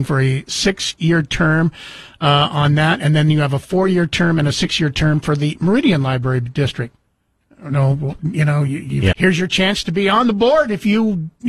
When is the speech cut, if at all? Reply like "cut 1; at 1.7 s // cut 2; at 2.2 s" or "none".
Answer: cut 1; at 9.1 s